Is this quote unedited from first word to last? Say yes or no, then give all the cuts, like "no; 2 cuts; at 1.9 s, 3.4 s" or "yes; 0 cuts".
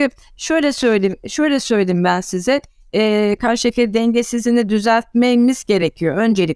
no; 1 cut; at 3.4 s